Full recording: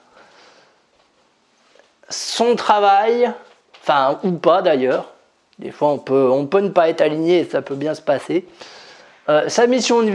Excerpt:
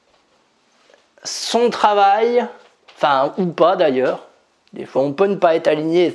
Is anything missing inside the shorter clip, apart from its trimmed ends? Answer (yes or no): yes